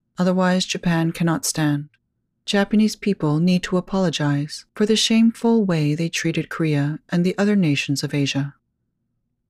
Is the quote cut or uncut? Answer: uncut